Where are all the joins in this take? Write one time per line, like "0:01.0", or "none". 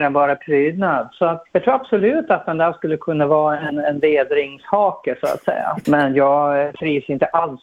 0:01.5
0:05.8